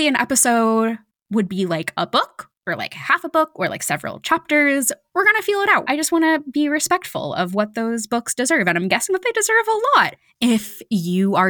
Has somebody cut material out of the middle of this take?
yes; 1 cut; at 5.8 s

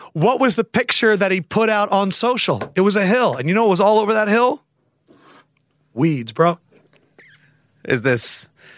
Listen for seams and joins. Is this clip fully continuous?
yes; 0 cuts

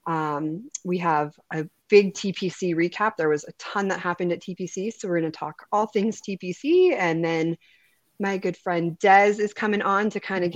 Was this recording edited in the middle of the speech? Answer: no; 0 cuts

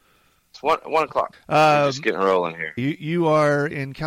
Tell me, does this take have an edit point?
yes; 2 cuts; at 1.3 s, 2.8 s

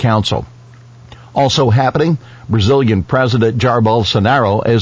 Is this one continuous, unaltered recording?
yes; 0 cuts

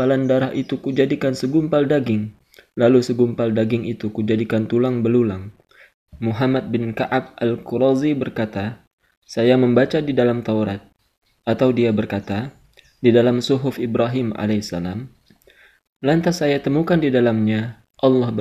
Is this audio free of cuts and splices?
no; 1 cut; at 5.9 s

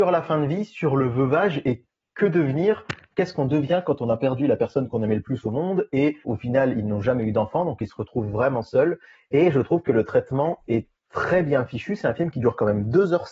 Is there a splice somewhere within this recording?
no; 0 cuts

